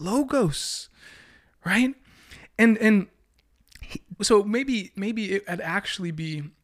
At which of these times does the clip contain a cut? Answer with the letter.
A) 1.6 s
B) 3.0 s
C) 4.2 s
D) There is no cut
C